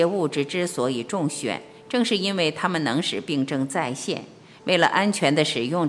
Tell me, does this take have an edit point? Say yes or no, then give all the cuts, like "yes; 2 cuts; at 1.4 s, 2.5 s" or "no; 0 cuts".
yes; 1 cut; at 4.6 s